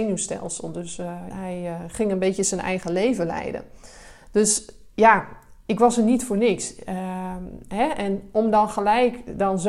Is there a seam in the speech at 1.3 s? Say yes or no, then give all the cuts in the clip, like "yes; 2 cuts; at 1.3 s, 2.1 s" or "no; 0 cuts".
yes; 1 cut; at 1.3 s